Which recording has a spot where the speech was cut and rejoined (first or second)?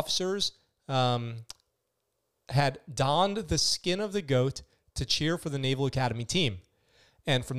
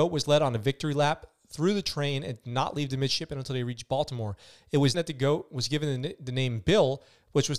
second